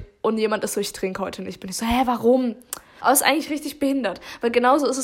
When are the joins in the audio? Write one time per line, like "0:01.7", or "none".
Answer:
0:03.0